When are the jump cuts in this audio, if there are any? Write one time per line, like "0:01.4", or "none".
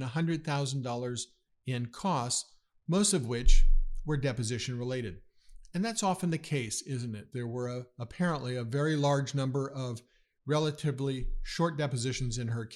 0:07.3